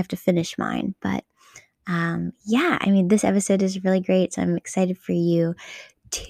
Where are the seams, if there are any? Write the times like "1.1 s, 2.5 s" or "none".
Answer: none

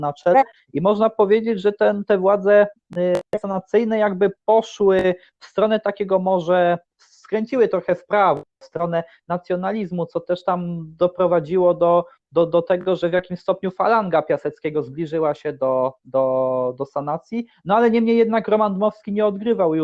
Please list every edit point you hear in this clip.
none

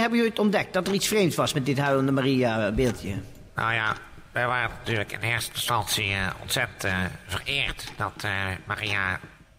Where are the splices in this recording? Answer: none

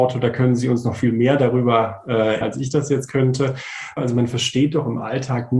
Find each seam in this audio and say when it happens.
2.4 s, 4.0 s

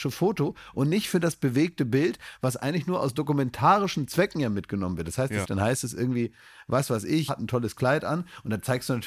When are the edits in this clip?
5.4 s, 7.3 s

